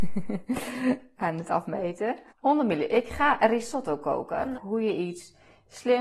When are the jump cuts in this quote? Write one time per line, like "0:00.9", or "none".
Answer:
0:02.3
0:04.5